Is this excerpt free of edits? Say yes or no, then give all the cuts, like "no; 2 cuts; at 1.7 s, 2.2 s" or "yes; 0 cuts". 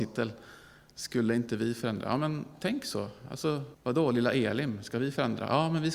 no; 1 cut; at 3.7 s